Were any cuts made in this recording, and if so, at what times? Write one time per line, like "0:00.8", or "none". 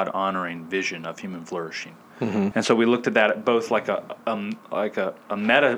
0:02.5